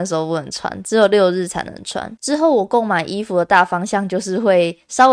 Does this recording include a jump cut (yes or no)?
yes